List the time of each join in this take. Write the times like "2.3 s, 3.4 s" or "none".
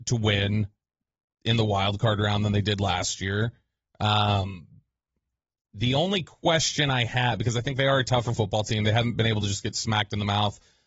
none